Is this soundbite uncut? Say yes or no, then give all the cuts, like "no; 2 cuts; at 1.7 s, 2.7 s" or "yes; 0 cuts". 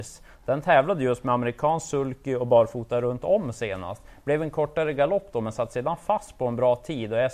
yes; 0 cuts